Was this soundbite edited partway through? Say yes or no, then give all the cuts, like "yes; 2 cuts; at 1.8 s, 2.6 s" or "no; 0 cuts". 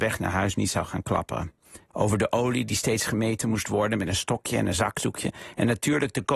yes; 1 cut; at 1.9 s